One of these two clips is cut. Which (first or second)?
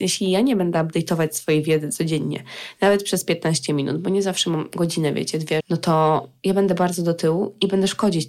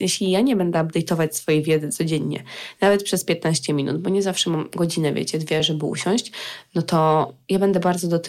first